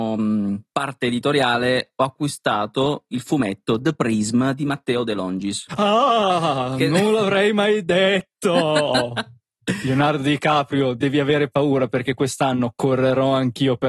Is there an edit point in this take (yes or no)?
no